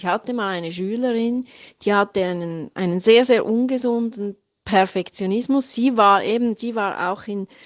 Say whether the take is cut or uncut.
uncut